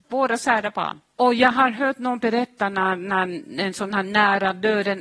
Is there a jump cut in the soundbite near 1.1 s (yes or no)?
yes